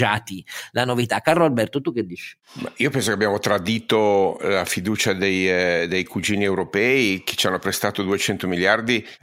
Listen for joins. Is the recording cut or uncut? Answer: uncut